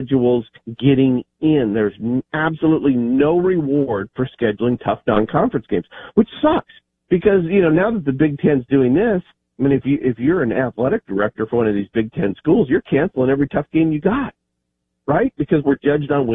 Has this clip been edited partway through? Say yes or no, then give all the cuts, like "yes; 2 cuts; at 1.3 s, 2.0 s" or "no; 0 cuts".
no; 0 cuts